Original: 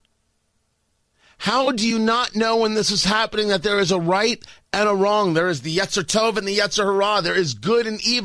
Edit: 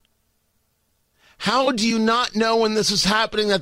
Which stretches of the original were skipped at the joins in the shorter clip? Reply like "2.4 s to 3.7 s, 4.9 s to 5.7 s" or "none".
none

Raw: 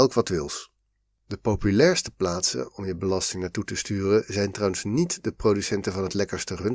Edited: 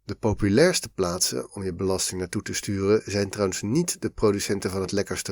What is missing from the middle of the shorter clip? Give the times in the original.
none

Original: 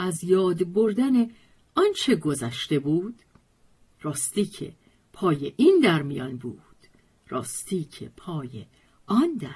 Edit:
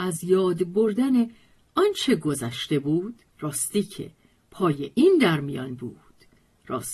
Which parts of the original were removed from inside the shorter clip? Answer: 3.3 s to 3.9 s

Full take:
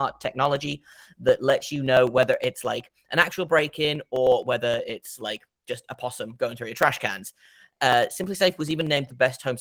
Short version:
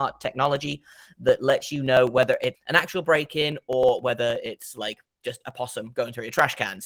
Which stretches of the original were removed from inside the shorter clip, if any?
2.6 s to 3.0 s

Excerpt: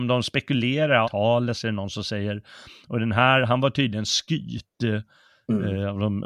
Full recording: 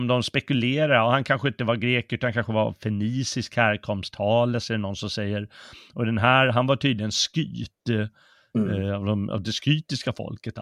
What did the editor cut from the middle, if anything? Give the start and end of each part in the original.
1.0 s to 4.1 s

